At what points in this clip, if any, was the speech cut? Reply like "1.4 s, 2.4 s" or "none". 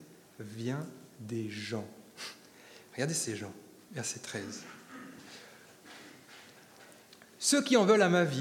none